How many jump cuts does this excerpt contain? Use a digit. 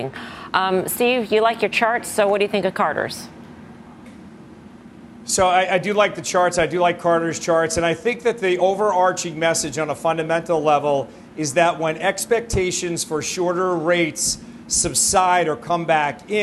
0